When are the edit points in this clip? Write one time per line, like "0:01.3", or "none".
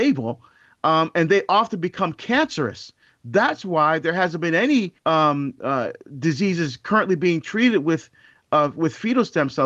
0:05.0